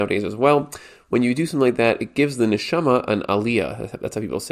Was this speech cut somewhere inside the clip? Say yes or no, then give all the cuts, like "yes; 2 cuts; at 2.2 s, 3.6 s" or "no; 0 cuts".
no; 0 cuts